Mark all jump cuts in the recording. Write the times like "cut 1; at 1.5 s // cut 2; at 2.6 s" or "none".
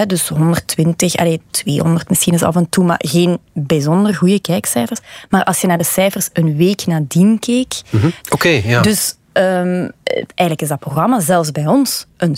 cut 1; at 8.2 s // cut 2; at 10.3 s